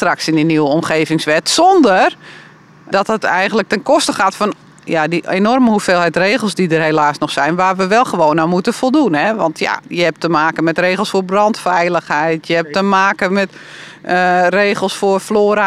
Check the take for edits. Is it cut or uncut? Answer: cut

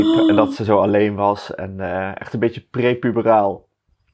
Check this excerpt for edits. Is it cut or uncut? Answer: uncut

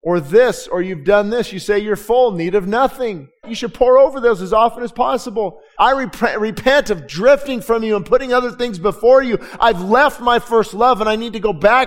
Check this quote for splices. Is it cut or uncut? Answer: cut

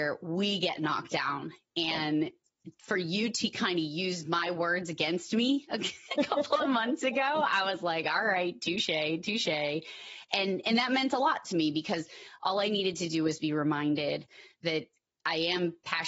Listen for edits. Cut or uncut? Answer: uncut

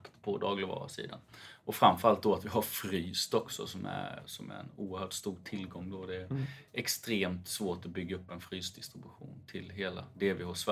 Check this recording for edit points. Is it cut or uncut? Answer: uncut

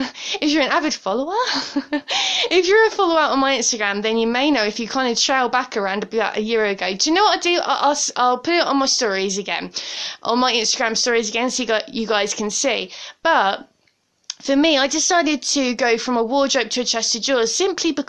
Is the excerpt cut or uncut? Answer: uncut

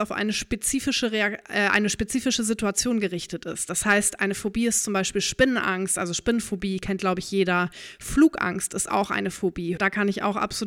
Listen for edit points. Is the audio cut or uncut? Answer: cut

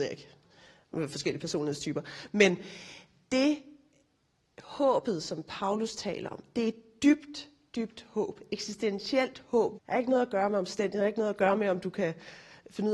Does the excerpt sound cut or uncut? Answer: cut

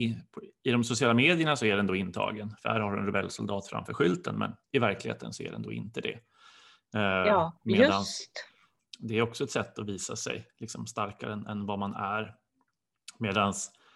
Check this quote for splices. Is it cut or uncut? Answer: cut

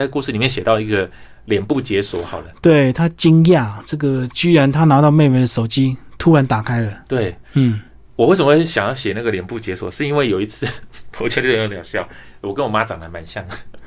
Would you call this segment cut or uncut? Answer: uncut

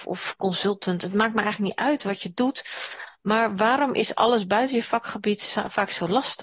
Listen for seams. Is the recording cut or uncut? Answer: uncut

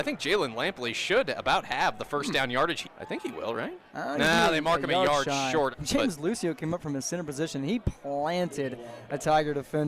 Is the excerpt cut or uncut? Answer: cut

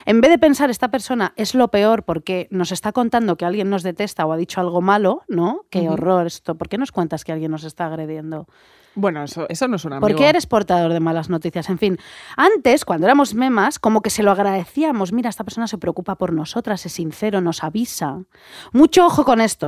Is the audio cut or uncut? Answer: cut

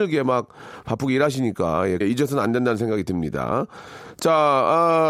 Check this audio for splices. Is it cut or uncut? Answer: cut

